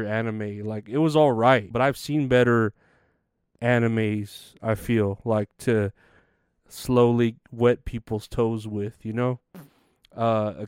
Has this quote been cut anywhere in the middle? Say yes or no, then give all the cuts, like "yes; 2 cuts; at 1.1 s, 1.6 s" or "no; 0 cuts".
yes; 1 cut; at 1.7 s